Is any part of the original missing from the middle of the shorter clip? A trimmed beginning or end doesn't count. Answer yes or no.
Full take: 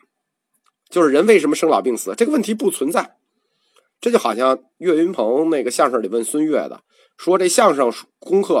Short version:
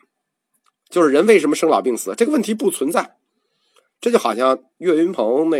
no